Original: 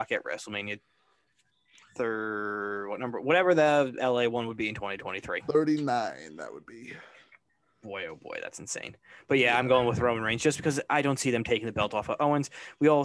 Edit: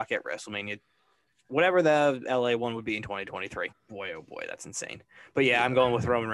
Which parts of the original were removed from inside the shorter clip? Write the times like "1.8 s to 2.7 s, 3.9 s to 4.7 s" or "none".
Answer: 1.5 s to 3.2 s, 5.4 s to 7.6 s